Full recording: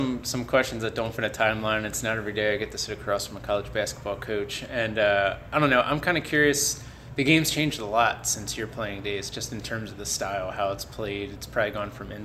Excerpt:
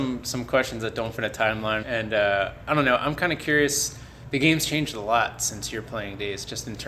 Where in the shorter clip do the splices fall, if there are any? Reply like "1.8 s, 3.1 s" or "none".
1.8 s